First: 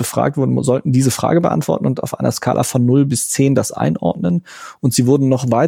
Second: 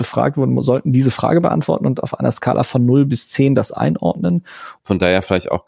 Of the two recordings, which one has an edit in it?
second; 1 cut; at 4.8 s

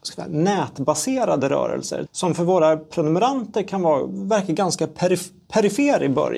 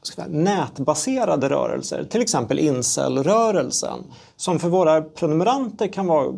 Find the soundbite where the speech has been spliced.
first; 1 cut; at 2.1 s

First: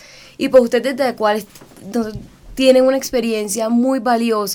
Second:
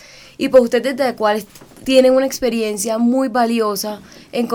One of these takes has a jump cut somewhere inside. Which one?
second; 1 cut; at 1.8 s

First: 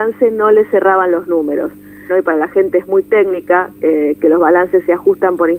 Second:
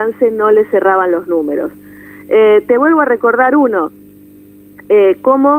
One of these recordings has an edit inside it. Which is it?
first; 1 cut; at 2.1 s

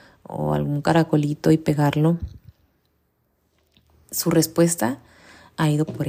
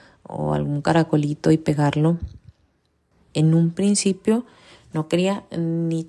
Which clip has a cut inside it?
second; 1 cut; at 3.1 s

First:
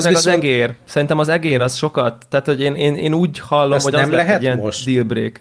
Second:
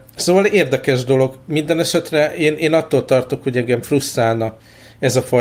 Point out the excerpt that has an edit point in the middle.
first; 1 cut; at 2.8 s

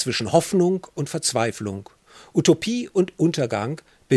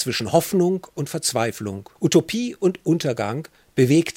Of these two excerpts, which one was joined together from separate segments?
second; 1 cut; at 2.0 s

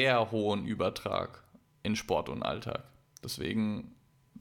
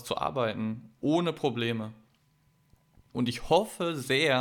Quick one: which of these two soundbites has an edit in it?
second; 1 cut; at 3.1 s

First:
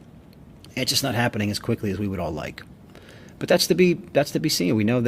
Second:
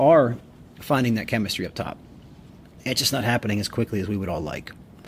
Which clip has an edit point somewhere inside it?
second; 1 cut; at 2.8 s

